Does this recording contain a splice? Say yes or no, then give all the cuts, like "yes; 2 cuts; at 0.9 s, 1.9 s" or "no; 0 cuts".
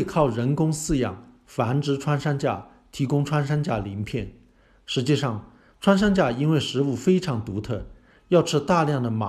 no; 0 cuts